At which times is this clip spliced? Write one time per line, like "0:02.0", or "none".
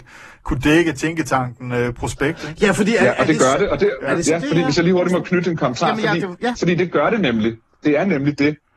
none